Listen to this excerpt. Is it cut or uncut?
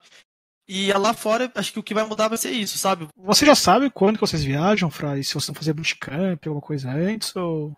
cut